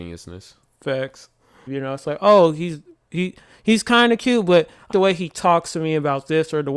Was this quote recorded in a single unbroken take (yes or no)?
no